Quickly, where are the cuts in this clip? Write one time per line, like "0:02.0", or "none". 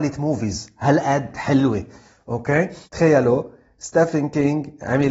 0:02.8